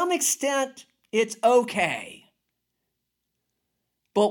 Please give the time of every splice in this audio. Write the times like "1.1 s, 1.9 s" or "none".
none

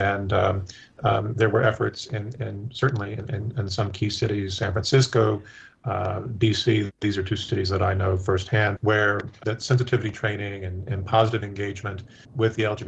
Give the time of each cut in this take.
8.8 s

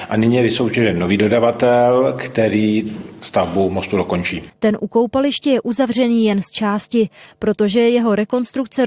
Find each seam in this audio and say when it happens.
4.5 s

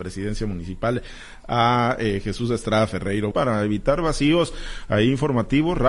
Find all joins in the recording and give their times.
3.3 s

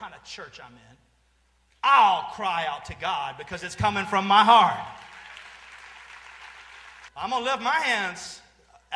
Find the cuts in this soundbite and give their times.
7.1 s

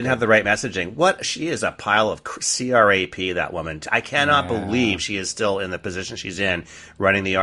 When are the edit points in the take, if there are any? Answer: none

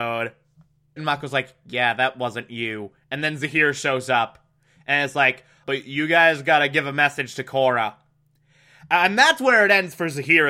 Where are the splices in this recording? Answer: 1.0 s, 5.6 s

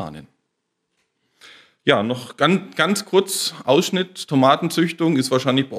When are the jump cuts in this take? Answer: none

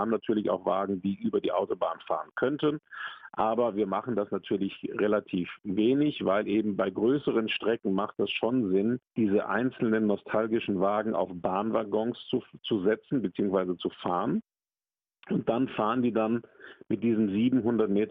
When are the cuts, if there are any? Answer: 9.1 s

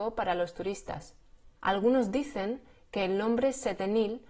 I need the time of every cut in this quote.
1.6 s

